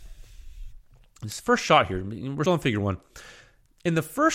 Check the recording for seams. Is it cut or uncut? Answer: cut